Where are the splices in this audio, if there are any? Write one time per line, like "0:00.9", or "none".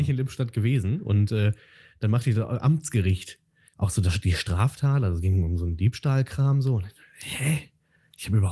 0:03.7